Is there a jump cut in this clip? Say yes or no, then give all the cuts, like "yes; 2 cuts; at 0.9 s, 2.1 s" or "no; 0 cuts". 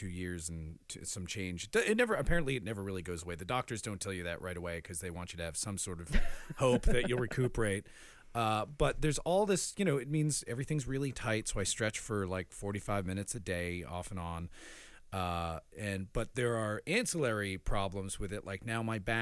no; 0 cuts